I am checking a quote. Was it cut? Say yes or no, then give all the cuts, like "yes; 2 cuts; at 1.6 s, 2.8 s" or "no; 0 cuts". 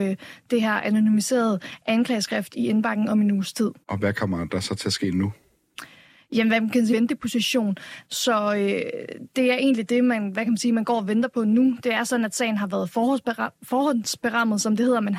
yes; 3 cuts; at 3.8 s, 6.9 s, 8.0 s